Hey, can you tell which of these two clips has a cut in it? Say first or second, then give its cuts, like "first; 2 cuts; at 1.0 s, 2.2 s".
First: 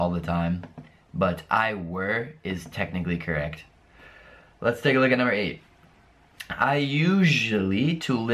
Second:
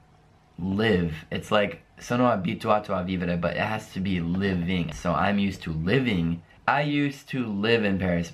second; 2 cuts; at 4.9 s, 6.6 s